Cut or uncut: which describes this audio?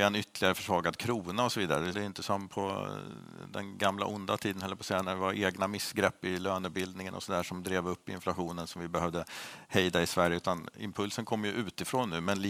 cut